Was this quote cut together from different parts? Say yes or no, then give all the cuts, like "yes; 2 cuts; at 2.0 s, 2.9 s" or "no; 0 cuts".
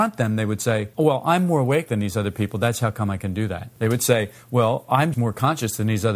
yes; 2 cuts; at 3.7 s, 5.1 s